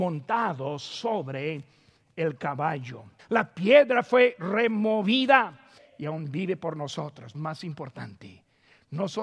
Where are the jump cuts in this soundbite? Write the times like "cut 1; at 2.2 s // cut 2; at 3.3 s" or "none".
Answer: cut 1; at 3.2 s // cut 2; at 5.8 s // cut 3; at 7.3 s